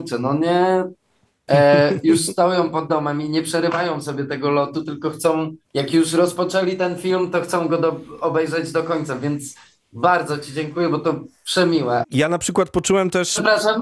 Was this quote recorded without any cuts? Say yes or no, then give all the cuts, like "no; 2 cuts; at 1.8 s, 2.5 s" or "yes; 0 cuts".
no; 3 cuts; at 1.5 s, 5.6 s, 12.0 s